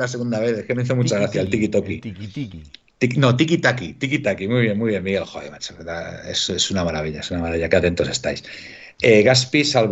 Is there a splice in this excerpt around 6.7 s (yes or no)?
no